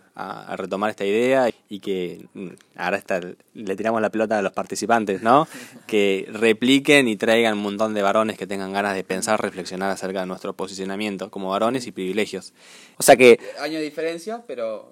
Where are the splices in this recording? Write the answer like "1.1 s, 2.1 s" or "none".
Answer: 1.5 s, 12.9 s